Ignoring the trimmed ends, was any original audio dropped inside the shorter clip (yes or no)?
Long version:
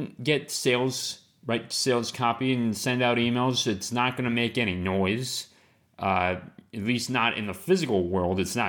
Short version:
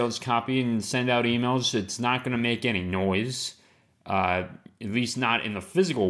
no